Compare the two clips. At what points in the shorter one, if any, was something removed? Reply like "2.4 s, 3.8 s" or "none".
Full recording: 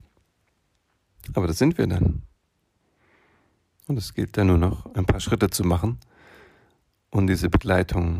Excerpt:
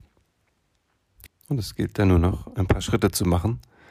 1.3 s